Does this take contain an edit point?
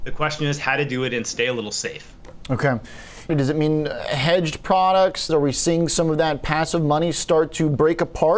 yes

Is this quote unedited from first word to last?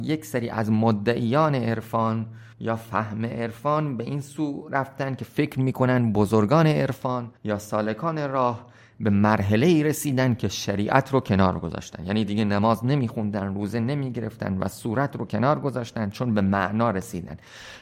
no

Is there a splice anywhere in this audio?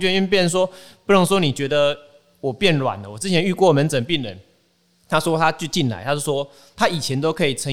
no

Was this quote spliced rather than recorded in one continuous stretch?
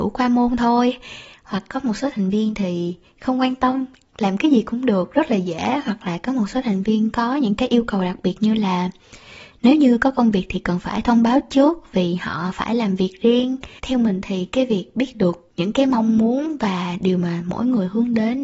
no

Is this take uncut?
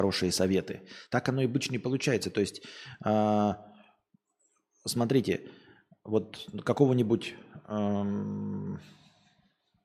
yes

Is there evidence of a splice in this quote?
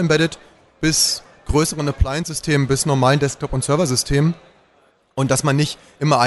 no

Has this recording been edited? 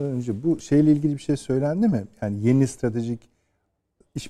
no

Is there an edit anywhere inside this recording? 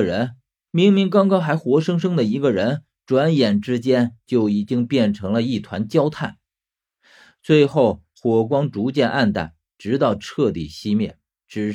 no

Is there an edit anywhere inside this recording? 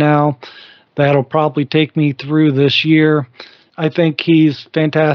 yes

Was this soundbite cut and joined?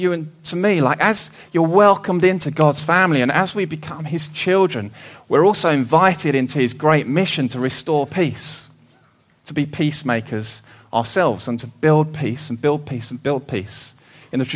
no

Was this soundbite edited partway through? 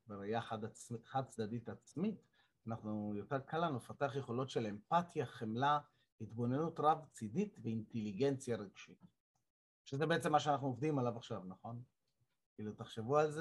no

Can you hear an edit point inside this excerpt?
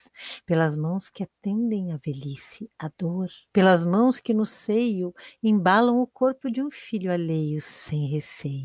yes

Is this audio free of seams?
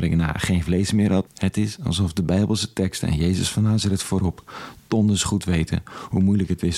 no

